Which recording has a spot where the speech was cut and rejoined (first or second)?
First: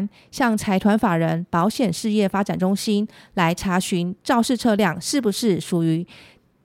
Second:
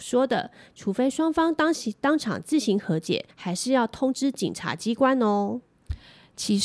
second